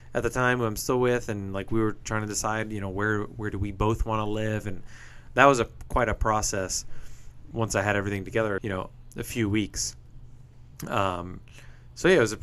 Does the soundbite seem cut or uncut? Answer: cut